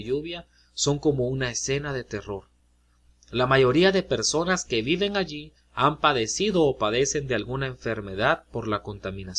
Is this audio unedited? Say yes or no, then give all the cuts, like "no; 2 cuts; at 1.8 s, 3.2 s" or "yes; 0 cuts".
yes; 0 cuts